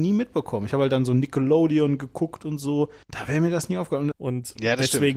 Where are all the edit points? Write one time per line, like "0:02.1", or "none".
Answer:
0:03.0
0:04.1

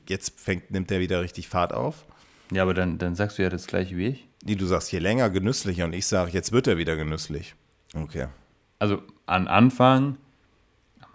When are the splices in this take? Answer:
0:04.3
0:07.7

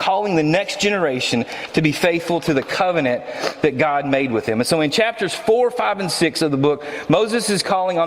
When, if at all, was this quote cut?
none

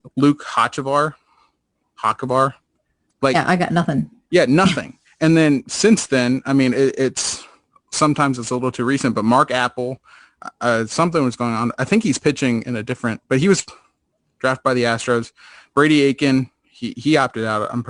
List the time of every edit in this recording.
none

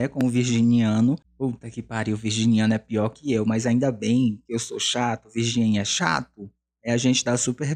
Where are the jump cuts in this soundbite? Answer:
none

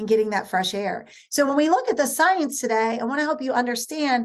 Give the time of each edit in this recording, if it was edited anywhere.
none

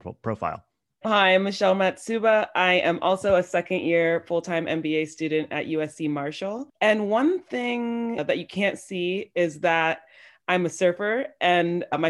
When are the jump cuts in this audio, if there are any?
0:01.0

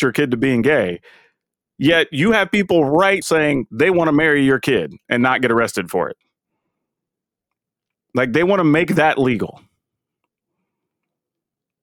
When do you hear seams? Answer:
0:03.2

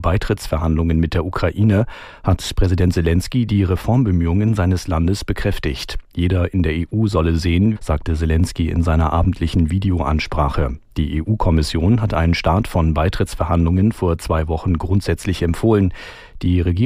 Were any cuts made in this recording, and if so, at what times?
0:07.8

